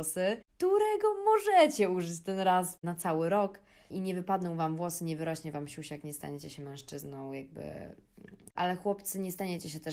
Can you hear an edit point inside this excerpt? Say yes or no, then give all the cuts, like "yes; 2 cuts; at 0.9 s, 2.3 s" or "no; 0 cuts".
yes; 2 cuts; at 3.9 s, 8.5 s